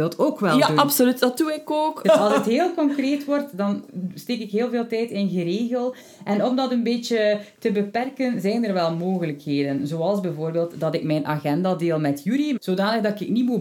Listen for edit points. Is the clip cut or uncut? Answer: cut